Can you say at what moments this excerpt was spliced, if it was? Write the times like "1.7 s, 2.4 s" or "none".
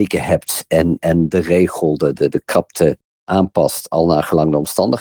2.2 s